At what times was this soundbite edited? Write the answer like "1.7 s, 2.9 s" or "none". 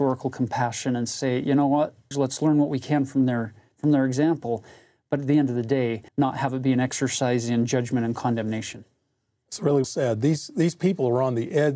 2.1 s, 6.1 s, 9.8 s